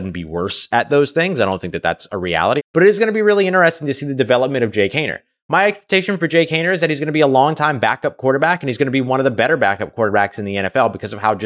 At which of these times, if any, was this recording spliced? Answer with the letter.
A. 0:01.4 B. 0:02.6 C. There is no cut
B